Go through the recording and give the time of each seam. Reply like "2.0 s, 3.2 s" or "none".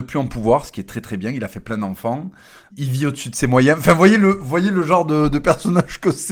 2.7 s